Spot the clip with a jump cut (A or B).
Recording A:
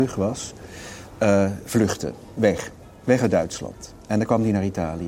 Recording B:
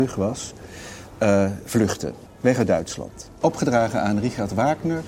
B